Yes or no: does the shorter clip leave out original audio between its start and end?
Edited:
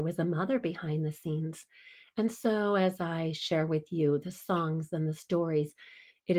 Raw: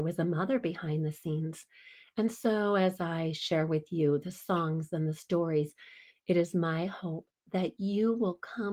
no